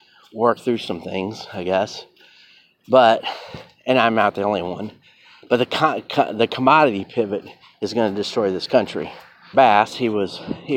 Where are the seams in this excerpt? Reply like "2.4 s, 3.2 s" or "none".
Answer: 9.5 s